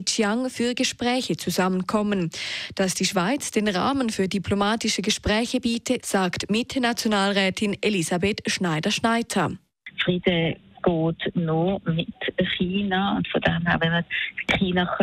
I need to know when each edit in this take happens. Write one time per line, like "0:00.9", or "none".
0:06.0